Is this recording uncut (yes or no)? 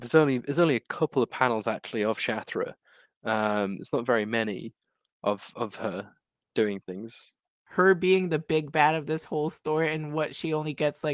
yes